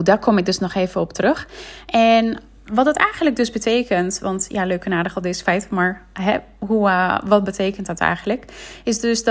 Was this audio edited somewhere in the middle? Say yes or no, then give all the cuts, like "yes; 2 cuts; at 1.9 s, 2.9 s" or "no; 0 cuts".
no; 0 cuts